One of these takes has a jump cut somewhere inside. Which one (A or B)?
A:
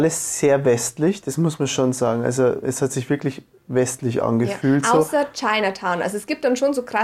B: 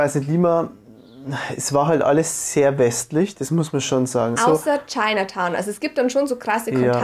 B